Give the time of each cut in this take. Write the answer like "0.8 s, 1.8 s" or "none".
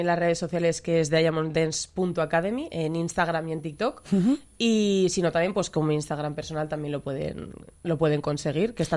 none